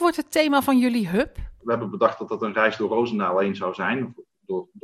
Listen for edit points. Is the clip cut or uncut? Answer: uncut